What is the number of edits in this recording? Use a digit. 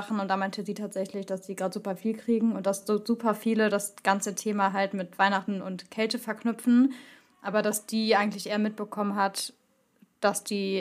0